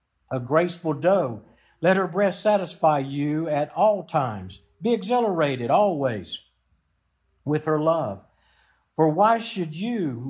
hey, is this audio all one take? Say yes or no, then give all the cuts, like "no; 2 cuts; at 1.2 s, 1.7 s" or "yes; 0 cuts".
yes; 0 cuts